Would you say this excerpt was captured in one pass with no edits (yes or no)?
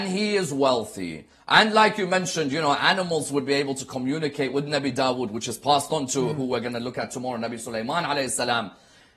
yes